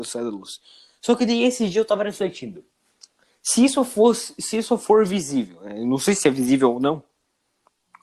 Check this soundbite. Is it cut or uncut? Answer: uncut